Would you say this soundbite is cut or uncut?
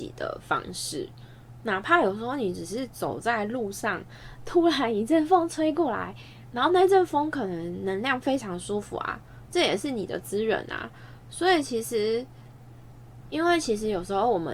cut